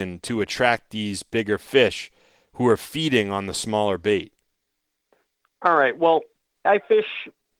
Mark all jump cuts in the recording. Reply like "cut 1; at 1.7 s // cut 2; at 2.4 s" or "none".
cut 1; at 6.7 s